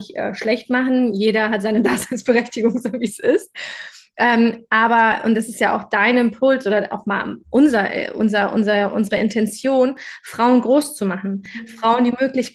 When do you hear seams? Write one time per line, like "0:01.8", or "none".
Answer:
none